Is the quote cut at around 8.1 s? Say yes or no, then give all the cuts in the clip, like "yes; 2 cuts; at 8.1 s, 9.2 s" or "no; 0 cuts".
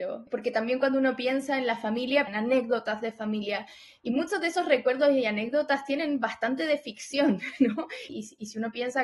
yes; 2 cuts; at 2.3 s, 8.1 s